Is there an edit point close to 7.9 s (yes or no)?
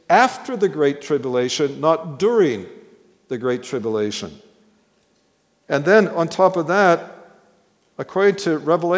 no